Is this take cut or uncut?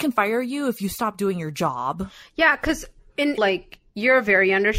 cut